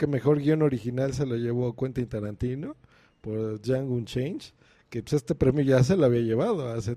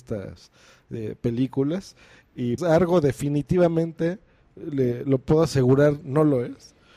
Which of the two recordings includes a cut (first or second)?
second